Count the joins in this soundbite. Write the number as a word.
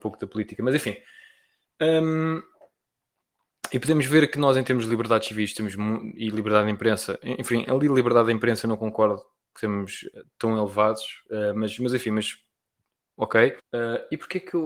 one